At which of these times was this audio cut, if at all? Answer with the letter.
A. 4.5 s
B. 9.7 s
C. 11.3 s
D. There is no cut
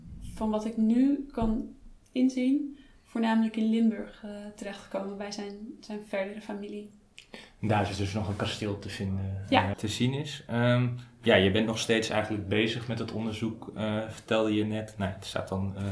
B